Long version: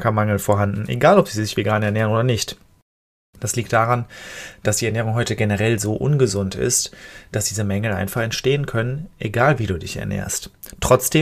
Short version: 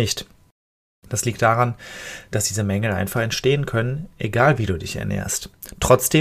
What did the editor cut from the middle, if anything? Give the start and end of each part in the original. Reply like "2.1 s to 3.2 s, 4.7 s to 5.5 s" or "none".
4.6 s to 7.3 s

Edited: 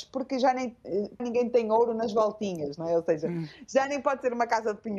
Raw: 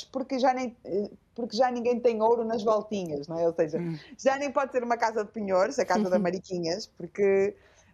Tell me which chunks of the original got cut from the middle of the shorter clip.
1.2 s to 1.7 s

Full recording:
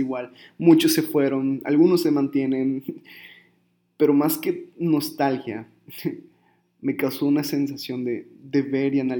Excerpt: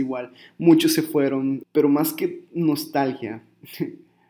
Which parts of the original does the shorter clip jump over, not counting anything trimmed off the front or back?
1.6 s to 3.9 s

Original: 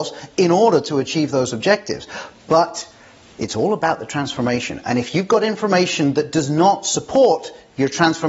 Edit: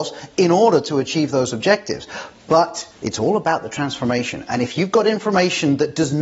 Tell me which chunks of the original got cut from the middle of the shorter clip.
3.0 s to 3.3 s

